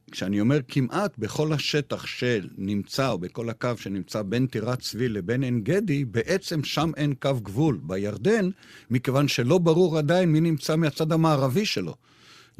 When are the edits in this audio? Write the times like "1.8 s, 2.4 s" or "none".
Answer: none